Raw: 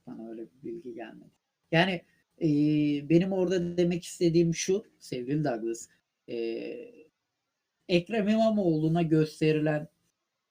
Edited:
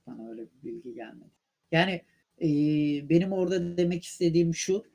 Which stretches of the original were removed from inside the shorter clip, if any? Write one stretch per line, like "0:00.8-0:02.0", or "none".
none